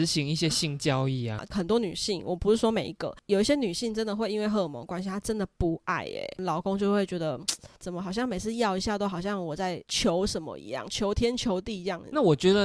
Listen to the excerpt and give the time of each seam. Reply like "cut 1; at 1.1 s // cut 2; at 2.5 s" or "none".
cut 1; at 1.4 s